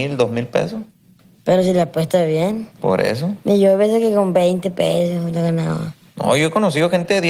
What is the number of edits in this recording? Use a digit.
1